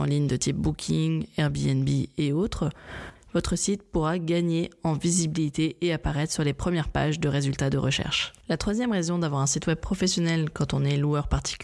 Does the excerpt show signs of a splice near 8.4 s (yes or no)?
yes